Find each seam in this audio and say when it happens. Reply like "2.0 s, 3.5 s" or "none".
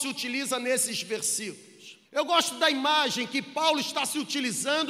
2.1 s